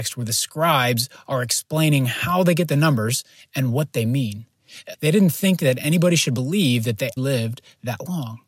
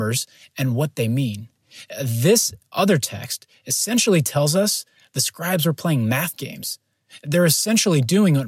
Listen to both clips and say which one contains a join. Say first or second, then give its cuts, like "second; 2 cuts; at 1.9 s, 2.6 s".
first; 2 cuts; at 4.9 s, 7.2 s